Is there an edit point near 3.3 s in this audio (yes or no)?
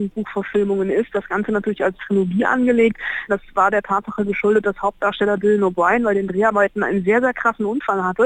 yes